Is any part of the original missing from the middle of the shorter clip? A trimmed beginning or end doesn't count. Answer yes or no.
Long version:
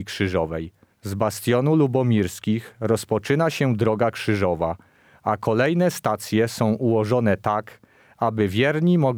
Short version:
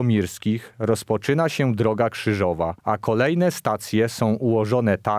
yes